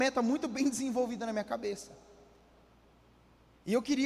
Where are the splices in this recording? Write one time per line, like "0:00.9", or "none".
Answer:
none